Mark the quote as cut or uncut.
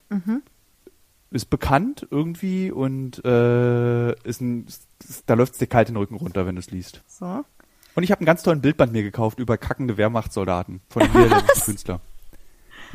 cut